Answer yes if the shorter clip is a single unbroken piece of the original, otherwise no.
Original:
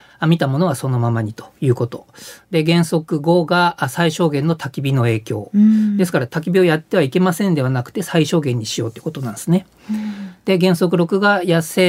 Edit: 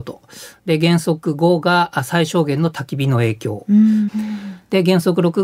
no